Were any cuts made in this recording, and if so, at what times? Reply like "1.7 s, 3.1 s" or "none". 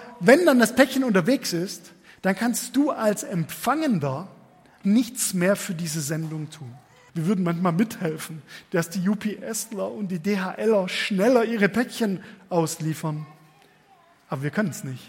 4.8 s, 7.1 s